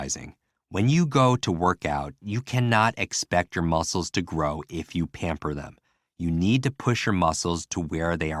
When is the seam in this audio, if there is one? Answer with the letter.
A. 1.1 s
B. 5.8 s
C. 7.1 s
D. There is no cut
D